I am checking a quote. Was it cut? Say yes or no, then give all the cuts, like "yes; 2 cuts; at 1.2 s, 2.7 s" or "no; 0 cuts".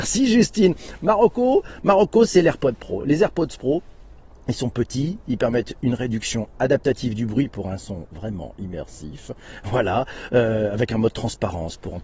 no; 0 cuts